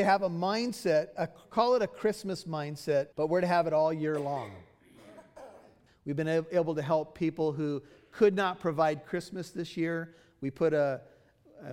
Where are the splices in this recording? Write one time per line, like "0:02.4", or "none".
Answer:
0:03.1
0:05.9